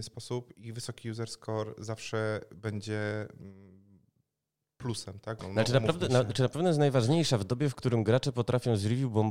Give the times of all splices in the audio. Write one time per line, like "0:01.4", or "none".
0:05.4